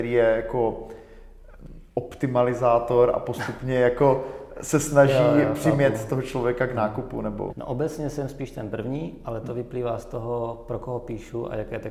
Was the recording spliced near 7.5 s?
yes; 1 cut; at 7.5 s

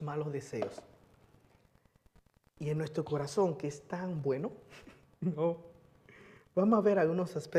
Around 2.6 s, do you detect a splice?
yes; 1 cut; at 2.6 s

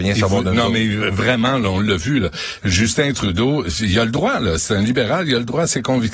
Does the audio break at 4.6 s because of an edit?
no; 0 cuts

